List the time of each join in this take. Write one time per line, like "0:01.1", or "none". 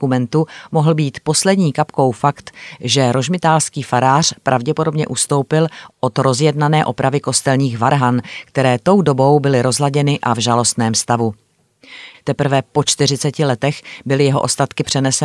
0:12.1